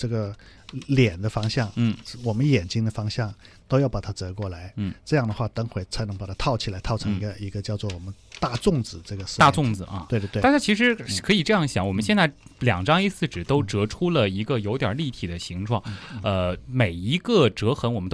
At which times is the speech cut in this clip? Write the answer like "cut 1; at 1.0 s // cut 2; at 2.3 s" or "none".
cut 1; at 5.8 s